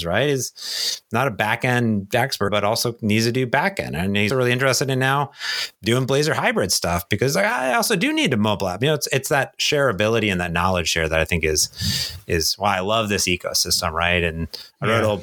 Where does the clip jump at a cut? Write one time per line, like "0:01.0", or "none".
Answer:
0:02.5
0:04.3